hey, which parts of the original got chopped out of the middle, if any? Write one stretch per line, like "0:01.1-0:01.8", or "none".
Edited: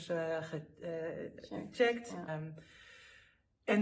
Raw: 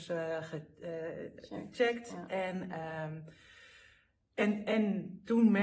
0:02.3-0:03.0